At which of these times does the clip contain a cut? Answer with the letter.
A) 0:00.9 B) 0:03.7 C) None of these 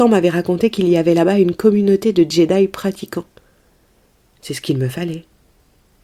C